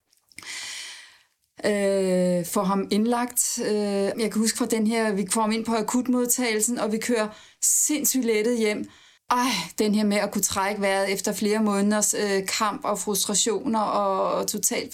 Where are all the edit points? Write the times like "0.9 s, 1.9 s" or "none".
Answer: 4.1 s, 9.2 s